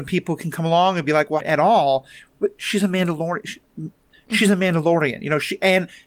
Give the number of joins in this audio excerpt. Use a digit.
1